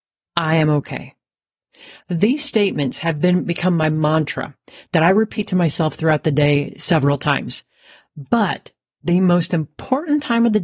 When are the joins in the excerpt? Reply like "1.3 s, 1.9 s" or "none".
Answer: none